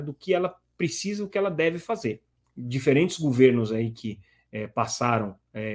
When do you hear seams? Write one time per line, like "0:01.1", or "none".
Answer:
0:02.4